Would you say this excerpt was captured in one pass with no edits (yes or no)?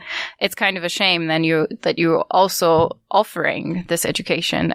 yes